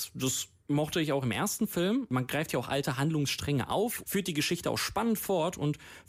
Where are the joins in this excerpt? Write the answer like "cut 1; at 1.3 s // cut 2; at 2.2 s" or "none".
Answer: cut 1; at 4.0 s